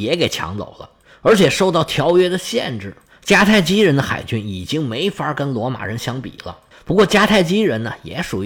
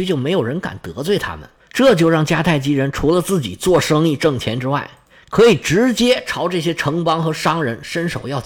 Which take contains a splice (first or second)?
first